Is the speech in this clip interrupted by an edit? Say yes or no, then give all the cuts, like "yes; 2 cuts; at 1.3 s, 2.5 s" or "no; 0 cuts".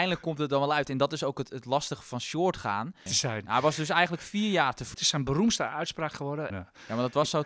yes; 3 cuts; at 3.1 s, 4.9 s, 6.5 s